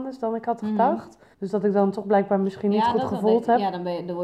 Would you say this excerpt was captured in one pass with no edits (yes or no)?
no